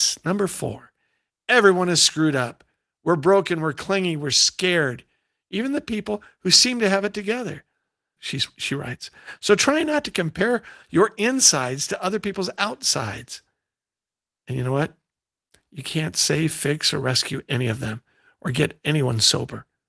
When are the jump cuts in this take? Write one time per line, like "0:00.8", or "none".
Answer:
0:08.2